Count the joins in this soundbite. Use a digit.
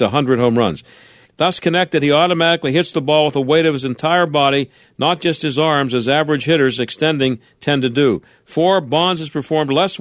1